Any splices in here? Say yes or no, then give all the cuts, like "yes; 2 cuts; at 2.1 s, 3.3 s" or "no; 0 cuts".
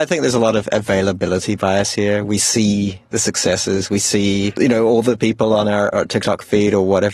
no; 0 cuts